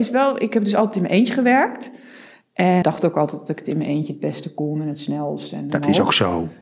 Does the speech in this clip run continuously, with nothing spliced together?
no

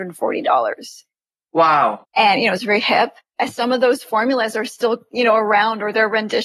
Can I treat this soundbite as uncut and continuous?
no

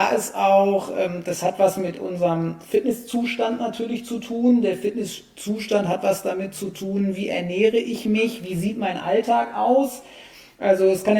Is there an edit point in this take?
no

